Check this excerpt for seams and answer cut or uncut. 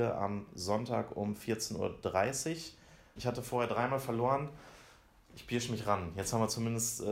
cut